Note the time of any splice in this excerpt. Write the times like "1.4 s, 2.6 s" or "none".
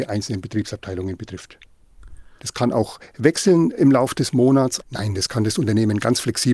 2.4 s, 4.8 s